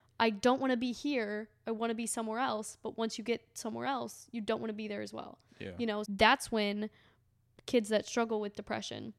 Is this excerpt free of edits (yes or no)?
no